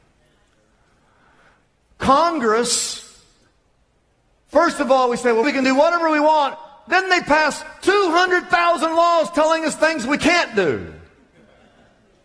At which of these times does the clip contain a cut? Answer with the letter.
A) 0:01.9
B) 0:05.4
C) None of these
B